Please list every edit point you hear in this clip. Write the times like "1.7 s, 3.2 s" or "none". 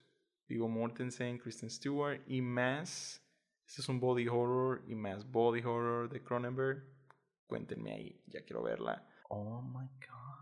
9.2 s